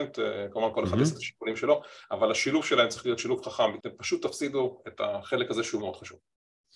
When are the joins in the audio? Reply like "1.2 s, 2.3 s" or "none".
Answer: 3.8 s, 5.8 s